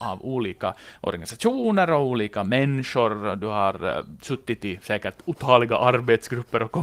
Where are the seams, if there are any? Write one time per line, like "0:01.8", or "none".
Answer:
none